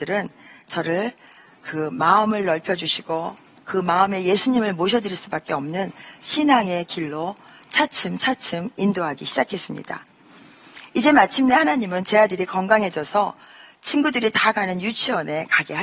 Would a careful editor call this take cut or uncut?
uncut